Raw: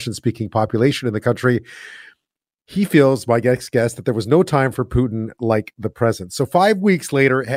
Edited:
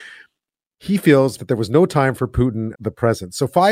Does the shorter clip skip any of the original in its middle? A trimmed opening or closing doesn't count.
yes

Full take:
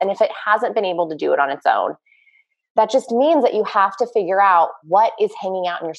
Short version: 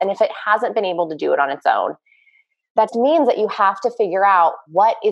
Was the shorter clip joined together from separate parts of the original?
yes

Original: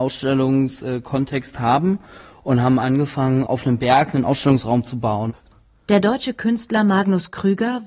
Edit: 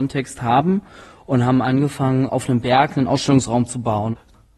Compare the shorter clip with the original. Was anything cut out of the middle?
no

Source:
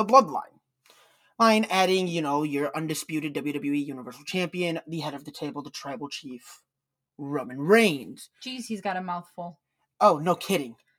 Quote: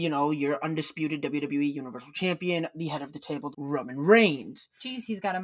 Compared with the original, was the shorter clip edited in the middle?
yes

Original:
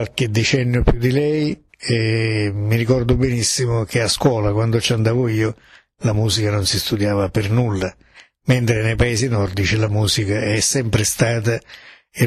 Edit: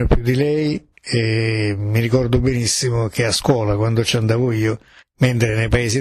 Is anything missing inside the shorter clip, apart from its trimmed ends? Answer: yes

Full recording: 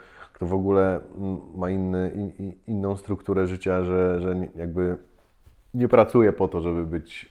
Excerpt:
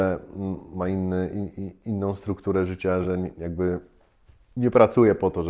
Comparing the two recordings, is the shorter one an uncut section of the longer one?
no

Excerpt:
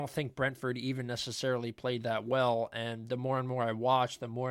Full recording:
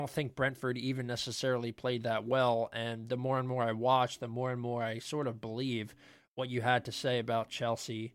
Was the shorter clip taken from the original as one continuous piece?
yes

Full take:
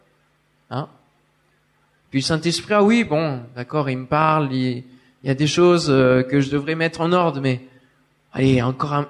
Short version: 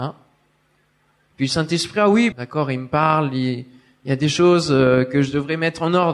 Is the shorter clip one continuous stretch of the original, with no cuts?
no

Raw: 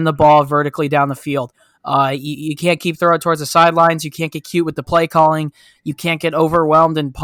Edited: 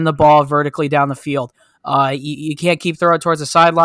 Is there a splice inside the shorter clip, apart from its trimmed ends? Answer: no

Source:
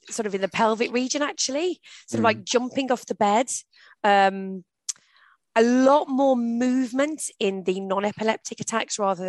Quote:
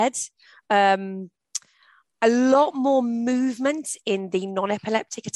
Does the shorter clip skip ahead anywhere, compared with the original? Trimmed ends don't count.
no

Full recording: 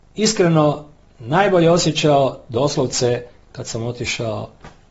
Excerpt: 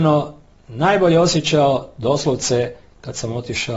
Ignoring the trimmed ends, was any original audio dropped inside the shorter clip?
no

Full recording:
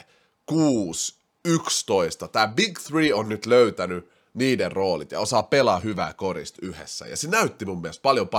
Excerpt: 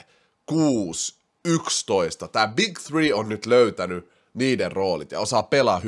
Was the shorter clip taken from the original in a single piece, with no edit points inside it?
yes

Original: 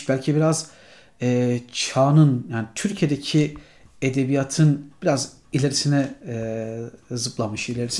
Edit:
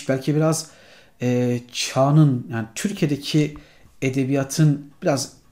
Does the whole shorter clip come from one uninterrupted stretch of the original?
yes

